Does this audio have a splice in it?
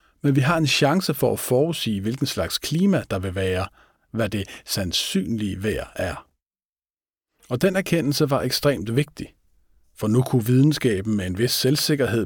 yes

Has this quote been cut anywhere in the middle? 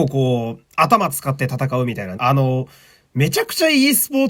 yes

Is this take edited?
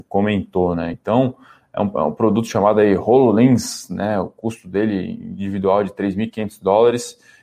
no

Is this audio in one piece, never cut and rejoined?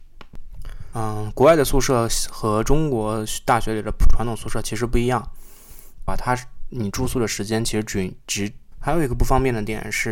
no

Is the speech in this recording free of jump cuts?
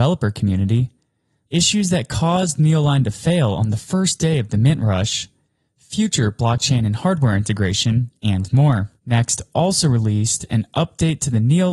no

